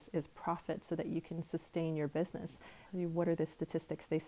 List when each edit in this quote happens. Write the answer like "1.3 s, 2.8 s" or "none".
2.9 s

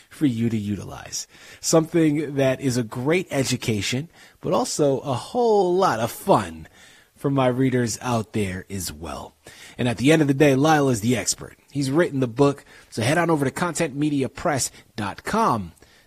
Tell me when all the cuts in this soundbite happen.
12.9 s

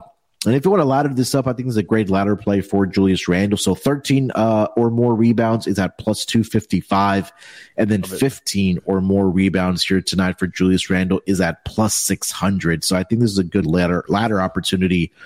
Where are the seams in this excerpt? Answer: none

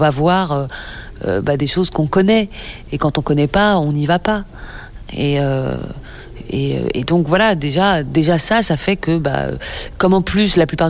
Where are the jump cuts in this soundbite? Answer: none

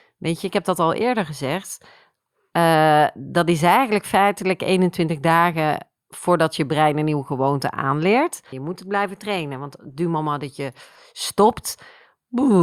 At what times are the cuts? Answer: 8.5 s

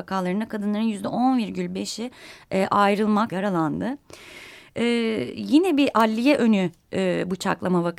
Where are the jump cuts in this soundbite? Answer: 3.3 s

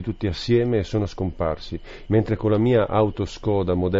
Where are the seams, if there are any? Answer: 2.1 s

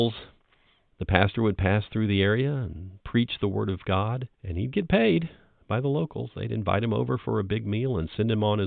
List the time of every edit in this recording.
4.3 s

